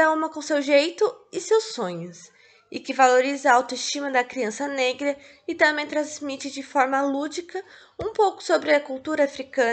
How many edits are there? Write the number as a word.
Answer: zero